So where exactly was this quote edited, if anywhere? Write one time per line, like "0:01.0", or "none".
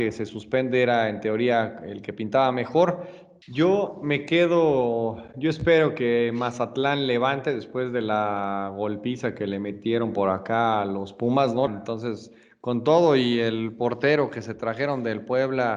0:03.4
0:11.7